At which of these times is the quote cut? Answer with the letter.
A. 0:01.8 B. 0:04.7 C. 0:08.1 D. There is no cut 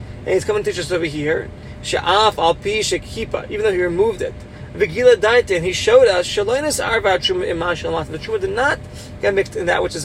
D